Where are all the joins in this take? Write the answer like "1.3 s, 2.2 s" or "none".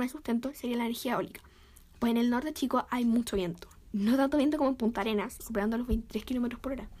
5.4 s